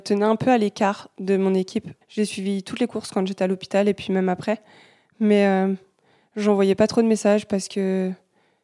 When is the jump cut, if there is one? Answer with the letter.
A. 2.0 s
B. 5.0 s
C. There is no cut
A